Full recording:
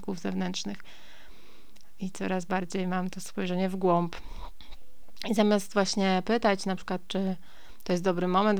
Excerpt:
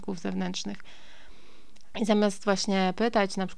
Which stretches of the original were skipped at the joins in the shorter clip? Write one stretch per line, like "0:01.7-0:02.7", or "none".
0:01.9-0:05.2